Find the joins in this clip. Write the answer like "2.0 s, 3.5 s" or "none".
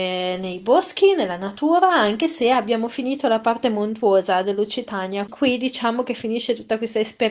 5.3 s

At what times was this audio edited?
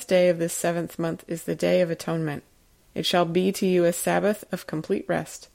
2.8 s

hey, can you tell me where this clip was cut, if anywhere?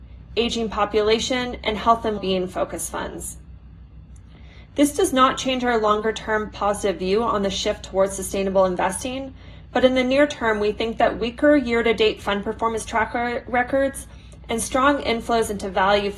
2.2 s, 4.7 s

